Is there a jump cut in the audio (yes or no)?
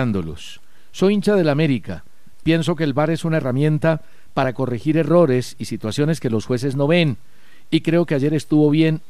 yes